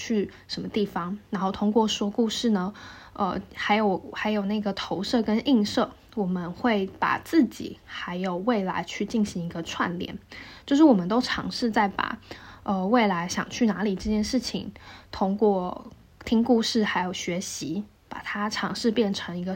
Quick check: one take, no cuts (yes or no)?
yes